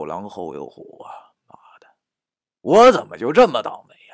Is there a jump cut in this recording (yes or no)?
no